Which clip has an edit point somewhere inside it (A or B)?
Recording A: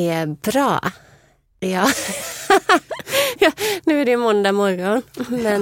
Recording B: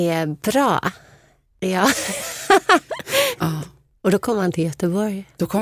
B